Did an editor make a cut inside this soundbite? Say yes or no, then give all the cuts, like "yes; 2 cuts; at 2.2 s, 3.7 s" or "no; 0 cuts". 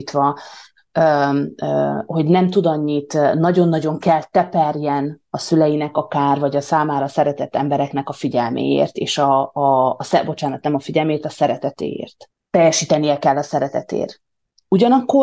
no; 0 cuts